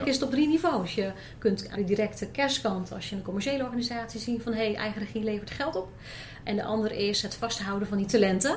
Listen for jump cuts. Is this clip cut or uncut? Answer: cut